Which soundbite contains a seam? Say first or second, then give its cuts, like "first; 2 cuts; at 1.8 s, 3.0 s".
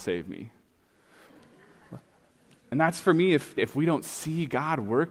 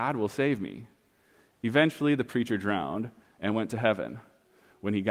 first; 2 cuts; at 1.3 s, 3.6 s